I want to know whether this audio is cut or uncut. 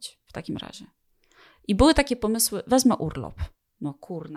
uncut